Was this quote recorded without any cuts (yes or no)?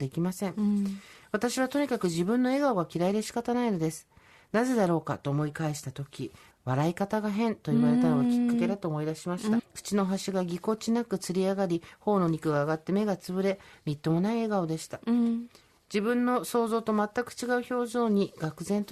no